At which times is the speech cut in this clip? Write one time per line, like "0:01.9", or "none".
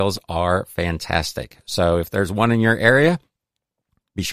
none